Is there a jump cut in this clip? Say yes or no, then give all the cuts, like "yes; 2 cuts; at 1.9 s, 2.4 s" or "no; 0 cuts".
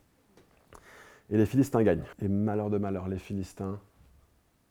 yes; 1 cut; at 2.1 s